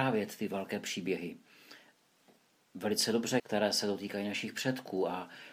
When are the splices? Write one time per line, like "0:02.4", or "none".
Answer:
0:03.4